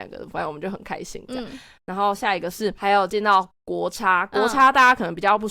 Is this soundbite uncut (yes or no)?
yes